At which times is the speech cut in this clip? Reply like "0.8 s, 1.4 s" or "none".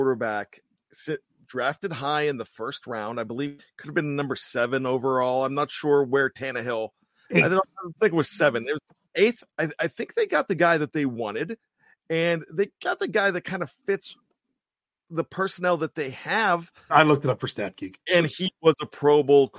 9.5 s, 16.9 s, 18.1 s

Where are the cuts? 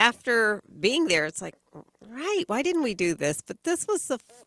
none

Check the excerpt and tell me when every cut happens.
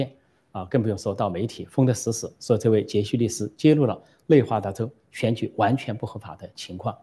none

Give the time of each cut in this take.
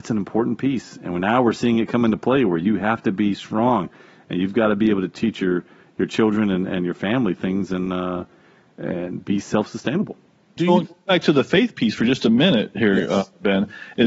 10.6 s

